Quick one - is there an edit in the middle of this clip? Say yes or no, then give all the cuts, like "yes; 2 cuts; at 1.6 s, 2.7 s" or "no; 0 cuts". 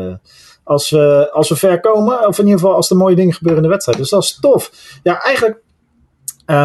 no; 0 cuts